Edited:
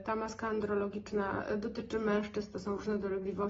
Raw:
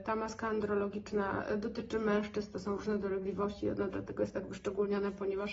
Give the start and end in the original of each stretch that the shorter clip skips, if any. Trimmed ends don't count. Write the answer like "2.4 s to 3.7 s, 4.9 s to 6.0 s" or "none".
none